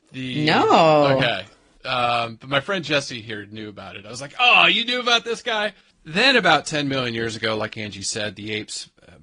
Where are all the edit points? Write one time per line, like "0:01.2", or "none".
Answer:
0:05.9